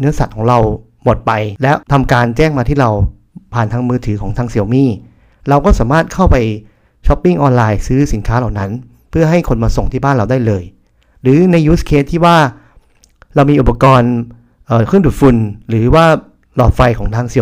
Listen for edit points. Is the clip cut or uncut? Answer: cut